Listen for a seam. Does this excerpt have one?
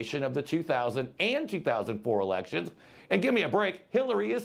no; 0 cuts

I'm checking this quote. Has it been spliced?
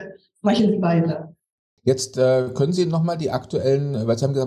no; 0 cuts

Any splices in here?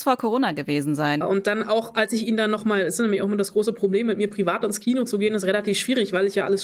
yes; 1 cut; at 1.2 s

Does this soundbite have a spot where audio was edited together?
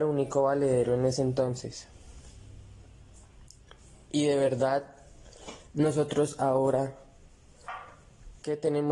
no; 0 cuts

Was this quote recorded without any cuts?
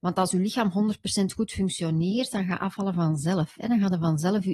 yes; 0 cuts

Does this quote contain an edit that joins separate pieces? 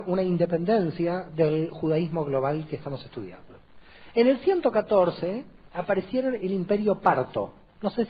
no; 0 cuts

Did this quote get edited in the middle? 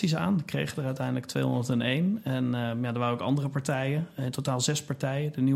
no; 0 cuts

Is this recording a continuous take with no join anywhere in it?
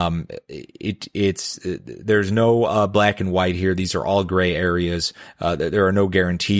yes; 0 cuts

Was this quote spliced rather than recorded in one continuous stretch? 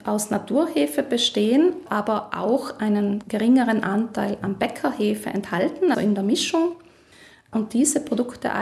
yes; 1 cut; at 5.9 s

